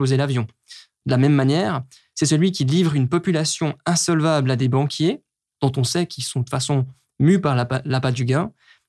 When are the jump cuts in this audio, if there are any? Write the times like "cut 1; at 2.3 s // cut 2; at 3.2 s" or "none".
none